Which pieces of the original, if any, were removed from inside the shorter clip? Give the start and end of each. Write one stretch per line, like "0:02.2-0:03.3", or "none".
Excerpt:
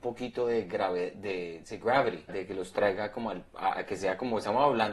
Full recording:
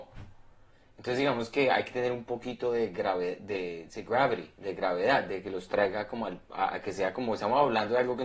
0:04.5-0:05.2